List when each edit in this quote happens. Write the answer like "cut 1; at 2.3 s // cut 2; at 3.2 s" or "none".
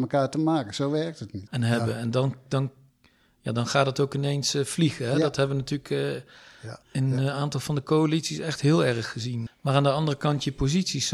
cut 1; at 1.5 s // cut 2; at 6.8 s // cut 3; at 9.5 s